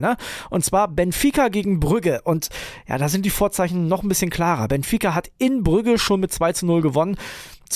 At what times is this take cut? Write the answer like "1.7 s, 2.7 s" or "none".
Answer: none

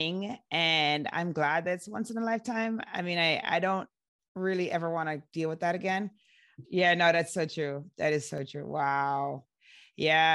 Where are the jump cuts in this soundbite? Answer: 6.6 s

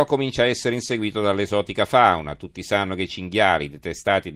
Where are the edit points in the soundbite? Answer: none

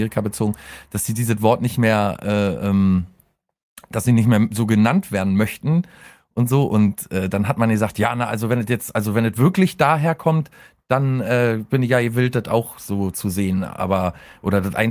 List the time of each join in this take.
none

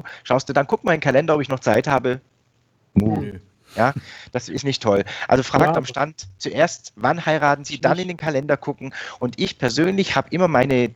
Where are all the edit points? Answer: none

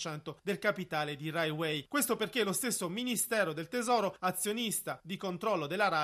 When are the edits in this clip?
none

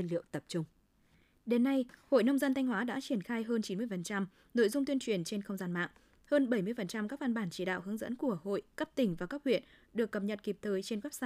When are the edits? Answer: none

